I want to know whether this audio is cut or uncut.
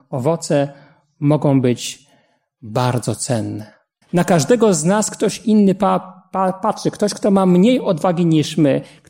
cut